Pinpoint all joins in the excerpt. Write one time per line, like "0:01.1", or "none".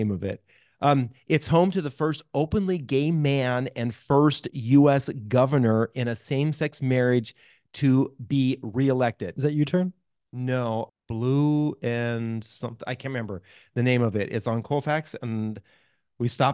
0:09.4
0:10.9